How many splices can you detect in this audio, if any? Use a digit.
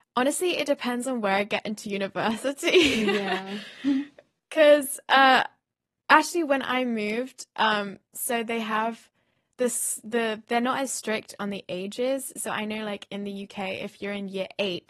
0